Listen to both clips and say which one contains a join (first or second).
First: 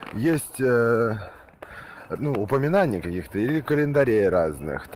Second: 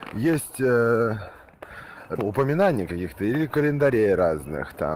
second